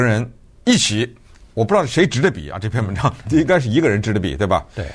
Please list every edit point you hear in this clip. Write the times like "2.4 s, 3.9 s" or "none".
none